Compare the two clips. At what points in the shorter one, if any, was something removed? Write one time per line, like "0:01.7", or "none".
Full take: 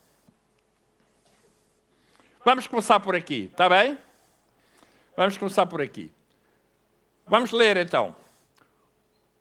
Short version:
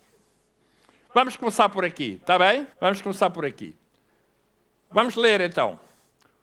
0:02.7